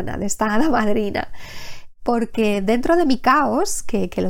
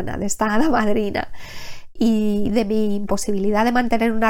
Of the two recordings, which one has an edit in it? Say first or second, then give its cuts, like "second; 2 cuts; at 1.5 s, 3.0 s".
second; 1 cut; at 2.0 s